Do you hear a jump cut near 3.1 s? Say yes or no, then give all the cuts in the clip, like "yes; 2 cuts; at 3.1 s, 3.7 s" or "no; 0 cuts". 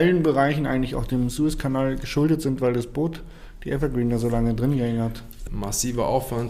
no; 1 cut; at 5.5 s